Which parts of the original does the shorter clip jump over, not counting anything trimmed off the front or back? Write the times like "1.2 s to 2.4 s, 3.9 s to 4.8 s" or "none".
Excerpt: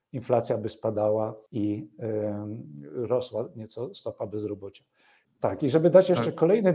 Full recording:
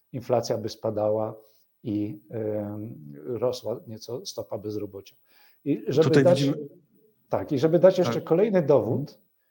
1.5 s to 1.8 s, 5.6 s to 7.1 s